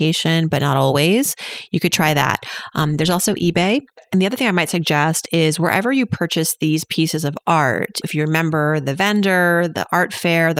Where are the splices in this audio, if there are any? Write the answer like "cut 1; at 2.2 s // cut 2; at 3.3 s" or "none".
cut 1; at 8.0 s